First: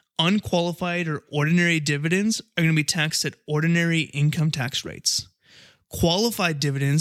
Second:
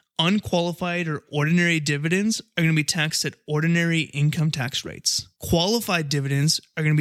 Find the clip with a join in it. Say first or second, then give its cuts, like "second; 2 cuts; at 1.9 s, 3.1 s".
second; 1 cut; at 5.3 s